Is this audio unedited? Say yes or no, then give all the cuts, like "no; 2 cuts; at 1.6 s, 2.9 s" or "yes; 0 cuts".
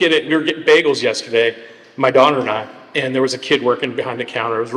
yes; 0 cuts